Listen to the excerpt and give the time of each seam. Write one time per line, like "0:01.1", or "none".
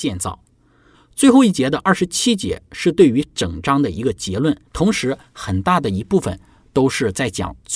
0:00.9
0:04.7

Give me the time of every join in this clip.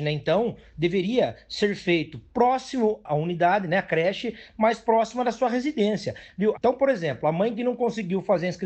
0:06.5

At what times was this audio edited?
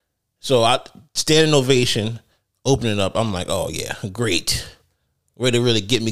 none

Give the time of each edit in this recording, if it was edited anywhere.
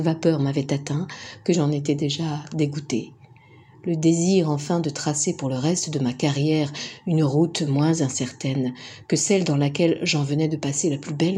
none

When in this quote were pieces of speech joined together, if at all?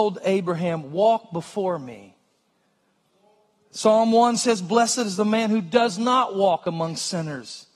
none

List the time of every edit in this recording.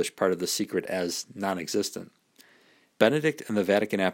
0:03.0

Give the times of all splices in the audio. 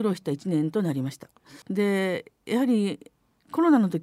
0:01.6

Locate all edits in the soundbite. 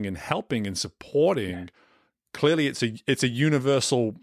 none

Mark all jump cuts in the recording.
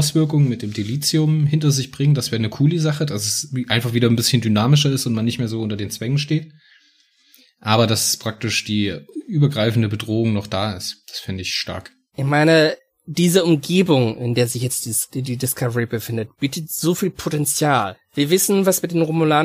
none

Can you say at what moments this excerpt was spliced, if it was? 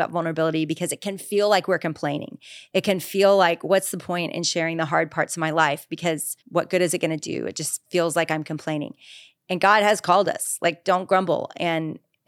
0:06.4

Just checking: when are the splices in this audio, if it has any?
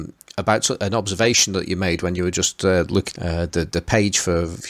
0:03.1

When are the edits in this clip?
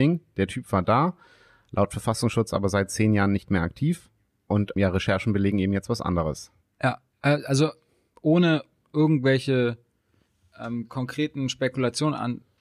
none

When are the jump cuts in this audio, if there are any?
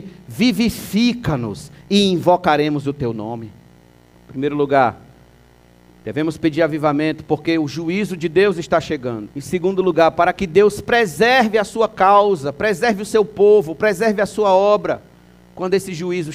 0:04.1
0:09.3

